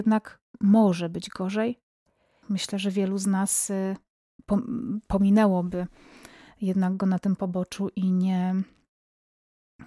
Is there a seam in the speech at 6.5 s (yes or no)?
no